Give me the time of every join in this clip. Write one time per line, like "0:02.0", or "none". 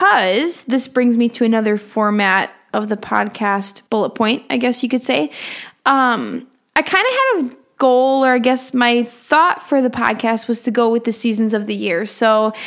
0:03.9